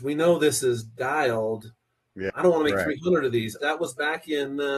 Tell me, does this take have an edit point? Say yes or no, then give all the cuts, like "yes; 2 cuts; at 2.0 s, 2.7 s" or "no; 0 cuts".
yes; 2 cuts; at 2.3 s, 3.6 s